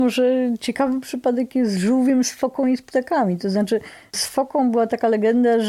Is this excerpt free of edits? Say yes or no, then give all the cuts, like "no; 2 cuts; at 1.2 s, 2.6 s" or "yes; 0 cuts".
yes; 0 cuts